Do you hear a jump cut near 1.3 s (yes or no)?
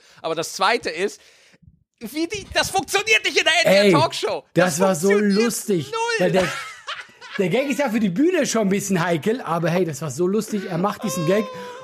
no